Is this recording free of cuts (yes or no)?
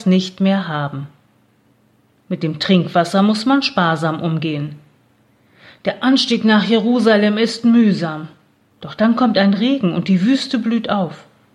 no